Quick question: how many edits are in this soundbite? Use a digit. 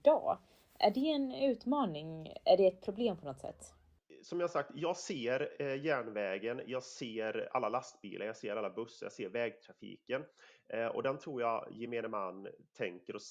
0